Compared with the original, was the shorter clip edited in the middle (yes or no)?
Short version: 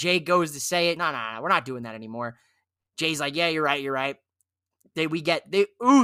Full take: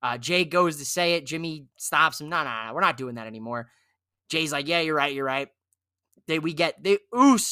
yes